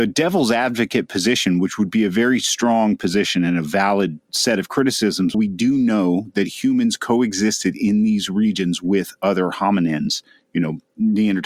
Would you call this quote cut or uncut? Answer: cut